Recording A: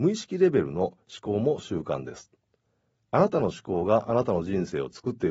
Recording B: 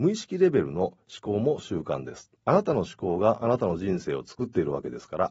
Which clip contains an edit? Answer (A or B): B